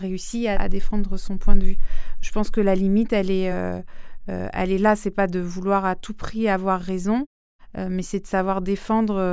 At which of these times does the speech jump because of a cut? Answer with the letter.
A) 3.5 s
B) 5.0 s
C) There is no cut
C